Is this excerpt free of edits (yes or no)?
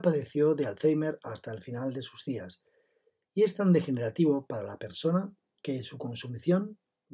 yes